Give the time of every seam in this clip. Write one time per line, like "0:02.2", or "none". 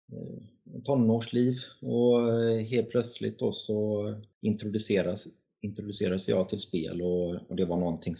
0:04.3